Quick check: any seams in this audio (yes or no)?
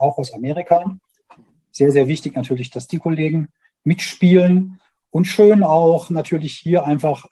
no